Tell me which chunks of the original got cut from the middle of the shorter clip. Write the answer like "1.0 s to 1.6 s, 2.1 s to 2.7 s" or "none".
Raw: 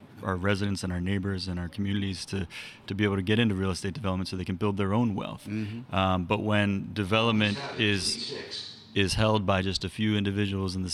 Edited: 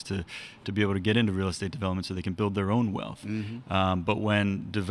none

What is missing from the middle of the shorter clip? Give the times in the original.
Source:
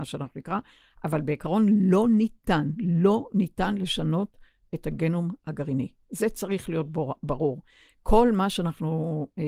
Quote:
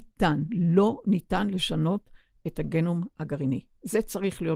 none

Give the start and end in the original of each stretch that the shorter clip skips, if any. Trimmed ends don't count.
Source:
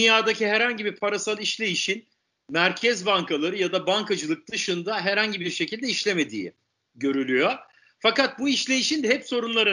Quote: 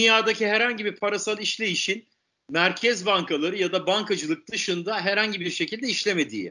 none

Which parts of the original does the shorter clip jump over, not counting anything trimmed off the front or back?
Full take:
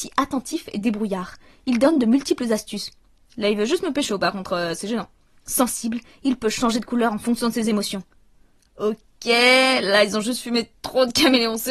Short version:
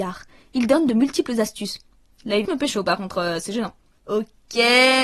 3.6 s to 3.8 s, 5.3 s to 8.7 s

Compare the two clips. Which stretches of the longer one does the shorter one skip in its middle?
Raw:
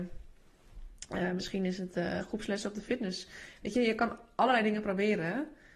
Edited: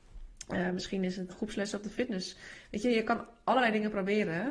1.9 s to 2.2 s

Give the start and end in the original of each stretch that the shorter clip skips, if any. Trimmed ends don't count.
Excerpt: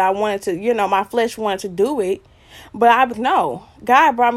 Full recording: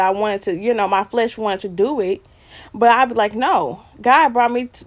3.1 s to 3.3 s

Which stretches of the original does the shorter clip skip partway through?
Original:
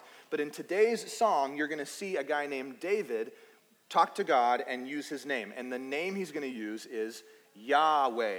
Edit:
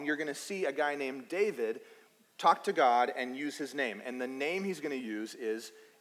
none

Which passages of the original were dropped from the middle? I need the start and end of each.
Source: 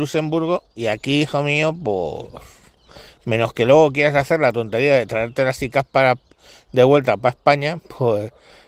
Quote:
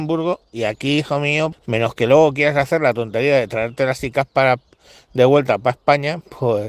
1.8 s to 3.1 s

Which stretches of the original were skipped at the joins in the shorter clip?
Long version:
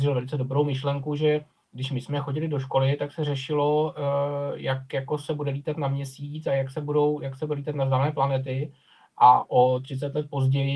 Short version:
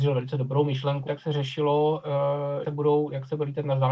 1.1 s to 3.0 s, 4.6 s to 6.7 s

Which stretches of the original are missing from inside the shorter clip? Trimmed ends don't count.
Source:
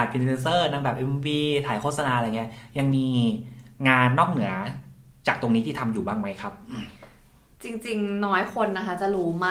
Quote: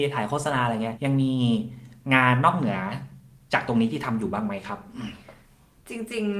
2.5 s to 2.7 s

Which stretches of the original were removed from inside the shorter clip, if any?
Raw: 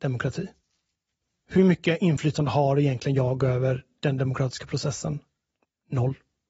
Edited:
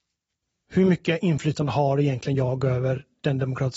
none

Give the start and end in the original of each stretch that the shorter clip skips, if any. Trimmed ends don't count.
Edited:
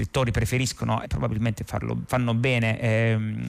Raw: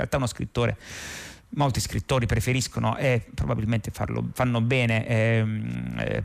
3.0 s to 3.3 s

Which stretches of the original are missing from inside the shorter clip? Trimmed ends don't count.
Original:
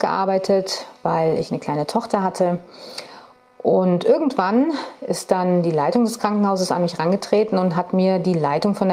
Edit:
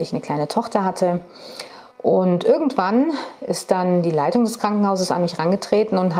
3.3 s to 3.5 s

